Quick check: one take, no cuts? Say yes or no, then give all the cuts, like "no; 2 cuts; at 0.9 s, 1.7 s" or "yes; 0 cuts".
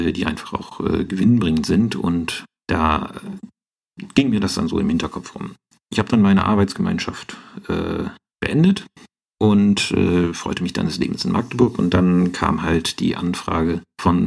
yes; 0 cuts